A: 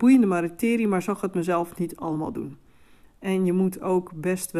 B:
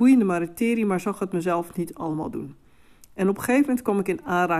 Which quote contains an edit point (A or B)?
A